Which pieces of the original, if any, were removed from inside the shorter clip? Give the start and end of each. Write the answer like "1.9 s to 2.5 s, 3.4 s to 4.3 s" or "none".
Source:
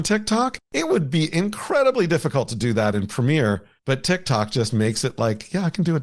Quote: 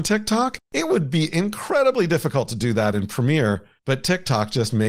none

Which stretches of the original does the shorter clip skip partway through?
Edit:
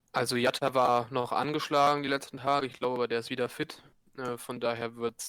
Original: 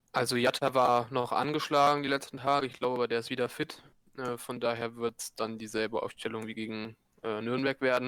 none

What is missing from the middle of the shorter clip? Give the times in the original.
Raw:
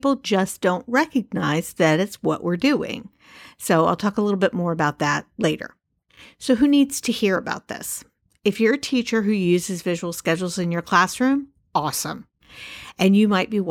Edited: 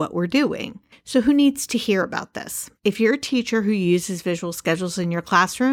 3.2 s to 6.3 s, 8.1 s to 8.4 s

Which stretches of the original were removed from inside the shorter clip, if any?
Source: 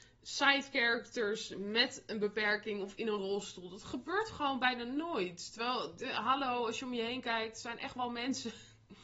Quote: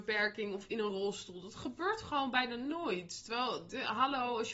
none

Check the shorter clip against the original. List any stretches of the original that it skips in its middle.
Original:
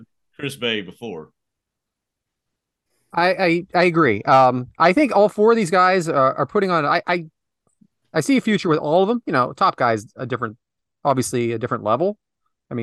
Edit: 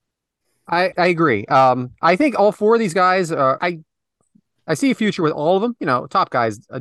3.4 s to 3.7 s, 6.3 s to 7.0 s

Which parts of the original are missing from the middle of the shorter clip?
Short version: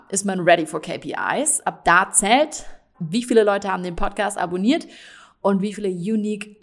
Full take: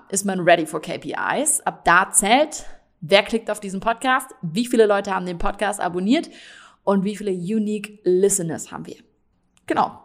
2.9 s to 4.4 s

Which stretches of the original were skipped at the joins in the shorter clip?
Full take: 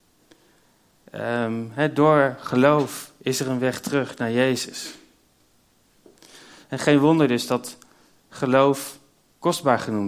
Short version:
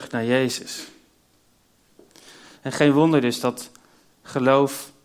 none

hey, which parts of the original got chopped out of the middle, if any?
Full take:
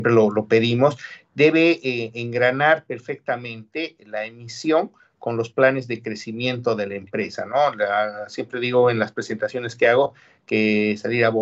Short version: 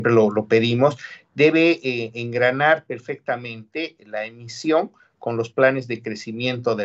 none

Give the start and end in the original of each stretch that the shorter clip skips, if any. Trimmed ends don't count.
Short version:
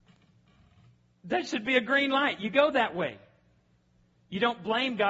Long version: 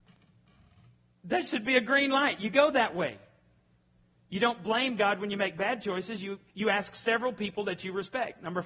none

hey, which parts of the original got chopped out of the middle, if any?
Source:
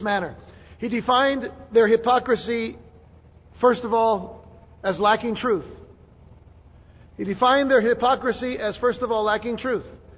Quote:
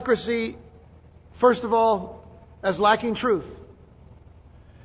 none

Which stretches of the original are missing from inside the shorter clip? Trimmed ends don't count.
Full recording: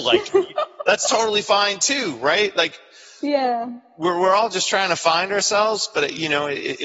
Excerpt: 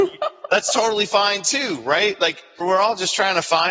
3.0 s to 4.1 s

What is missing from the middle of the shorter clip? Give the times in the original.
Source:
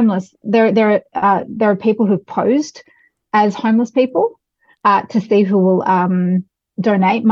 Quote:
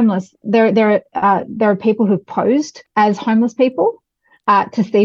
2.9 s to 3.2 s

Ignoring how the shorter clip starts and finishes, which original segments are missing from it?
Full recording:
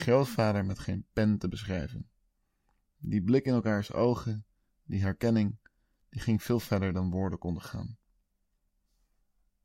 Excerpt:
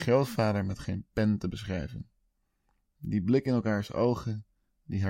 none

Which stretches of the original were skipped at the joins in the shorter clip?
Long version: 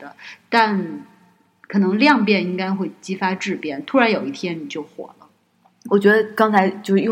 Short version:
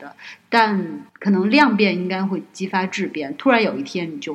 1.1 s to 1.6 s

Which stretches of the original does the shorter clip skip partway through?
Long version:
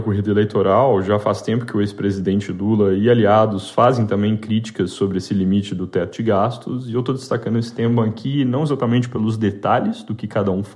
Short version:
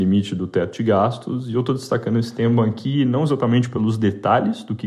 none

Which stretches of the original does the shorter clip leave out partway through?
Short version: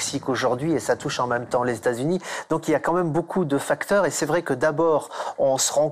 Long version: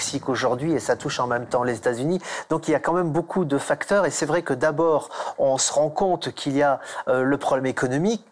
none

